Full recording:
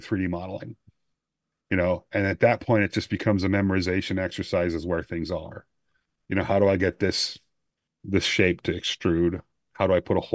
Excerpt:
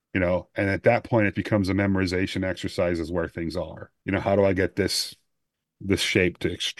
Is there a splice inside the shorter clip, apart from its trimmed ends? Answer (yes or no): yes